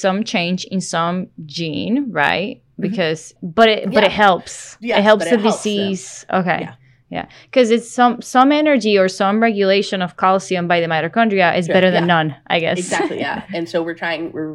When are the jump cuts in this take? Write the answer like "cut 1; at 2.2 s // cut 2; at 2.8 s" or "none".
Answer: cut 1; at 3.4 s